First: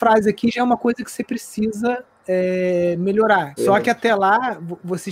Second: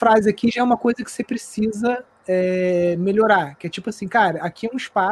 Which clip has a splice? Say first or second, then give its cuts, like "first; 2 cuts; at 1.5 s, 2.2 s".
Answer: first; 1 cut; at 3.6 s